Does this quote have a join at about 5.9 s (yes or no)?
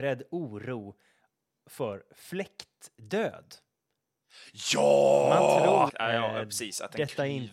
yes